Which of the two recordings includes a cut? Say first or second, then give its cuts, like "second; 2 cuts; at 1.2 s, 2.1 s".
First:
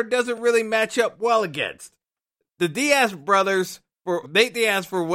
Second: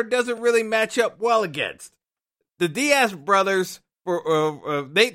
first; 1 cut; at 4.2 s